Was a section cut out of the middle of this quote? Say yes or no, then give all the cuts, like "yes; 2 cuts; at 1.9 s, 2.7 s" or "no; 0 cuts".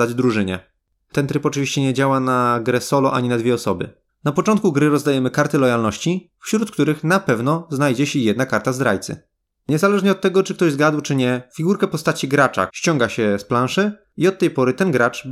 yes; 3 cuts; at 4.1 s, 9.5 s, 12.7 s